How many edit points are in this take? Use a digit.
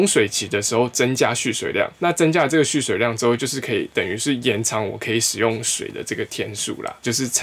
1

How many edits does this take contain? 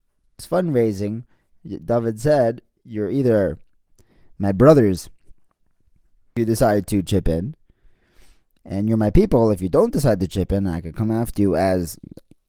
0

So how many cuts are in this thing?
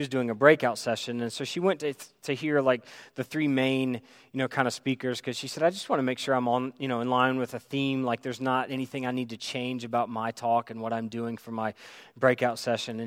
0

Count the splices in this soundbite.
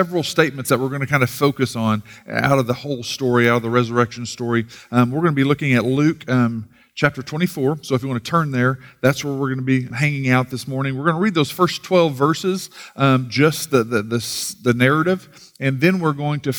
1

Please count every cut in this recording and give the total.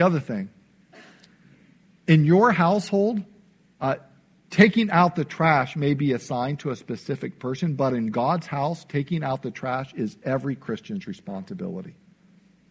0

